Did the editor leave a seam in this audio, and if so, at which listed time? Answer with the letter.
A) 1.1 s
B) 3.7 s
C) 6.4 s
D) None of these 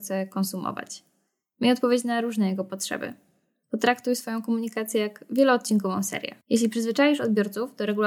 C